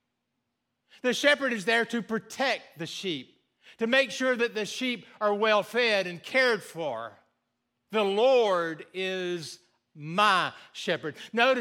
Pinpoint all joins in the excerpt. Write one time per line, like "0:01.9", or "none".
none